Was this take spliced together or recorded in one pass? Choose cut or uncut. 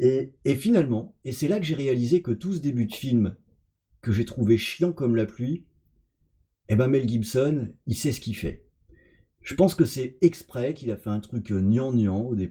uncut